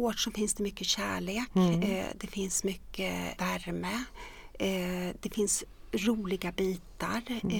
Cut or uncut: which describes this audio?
cut